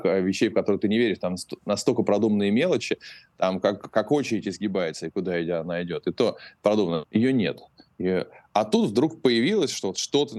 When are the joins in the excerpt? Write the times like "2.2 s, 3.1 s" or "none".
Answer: 7.0 s